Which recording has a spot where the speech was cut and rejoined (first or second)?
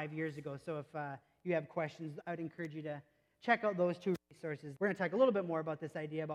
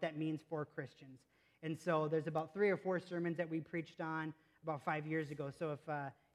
first